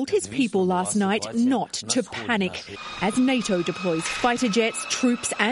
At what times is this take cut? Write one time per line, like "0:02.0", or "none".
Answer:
none